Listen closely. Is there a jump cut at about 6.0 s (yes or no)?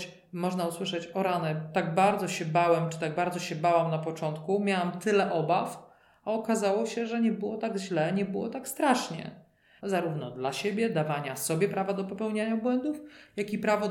no